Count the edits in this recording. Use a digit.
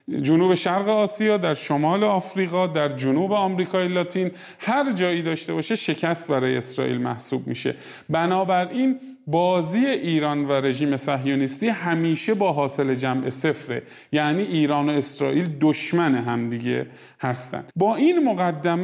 1